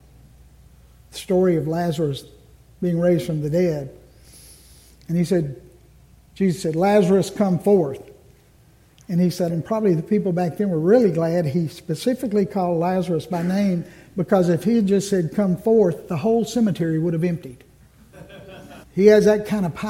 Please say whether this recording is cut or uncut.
cut